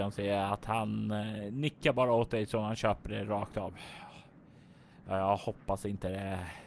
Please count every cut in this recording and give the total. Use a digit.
0